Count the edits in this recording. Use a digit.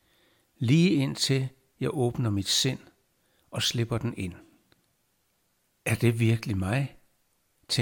1